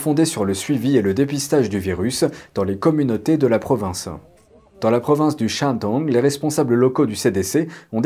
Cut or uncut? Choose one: uncut